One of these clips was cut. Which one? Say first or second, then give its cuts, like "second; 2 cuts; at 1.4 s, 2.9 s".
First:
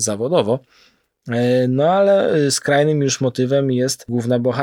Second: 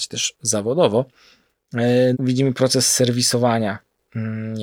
second; 1 cut; at 2.1 s